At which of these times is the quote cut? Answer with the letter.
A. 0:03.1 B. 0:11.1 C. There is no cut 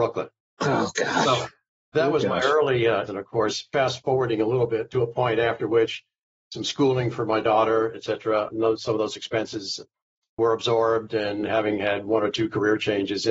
A